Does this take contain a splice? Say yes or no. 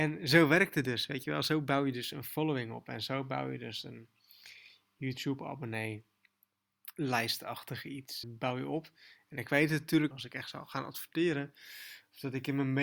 yes